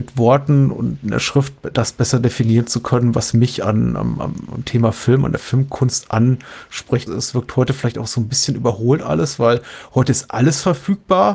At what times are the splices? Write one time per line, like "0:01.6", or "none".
0:07.1

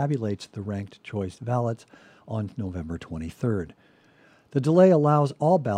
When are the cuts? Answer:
none

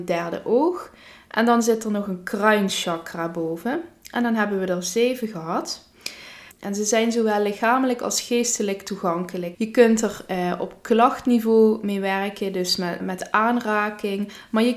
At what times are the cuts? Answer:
0:06.5
0:09.5
0:13.0

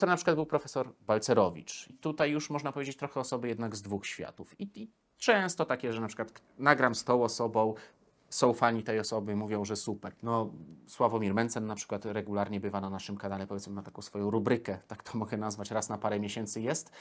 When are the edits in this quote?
0:01.9
0:10.2

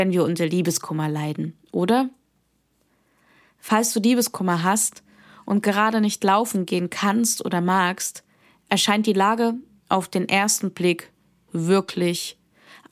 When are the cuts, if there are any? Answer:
none

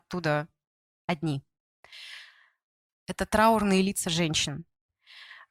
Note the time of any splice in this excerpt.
0:02.9

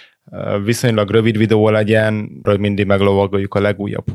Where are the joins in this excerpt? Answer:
0:02.4

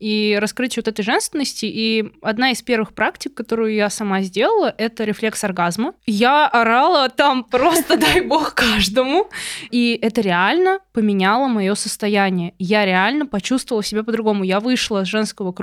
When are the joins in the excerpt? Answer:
0:09.7

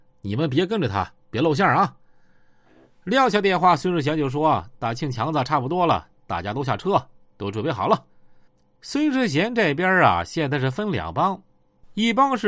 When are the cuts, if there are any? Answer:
none

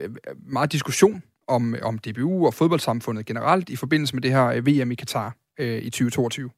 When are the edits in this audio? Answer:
none

